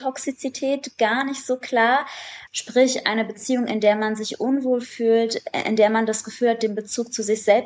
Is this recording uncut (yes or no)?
no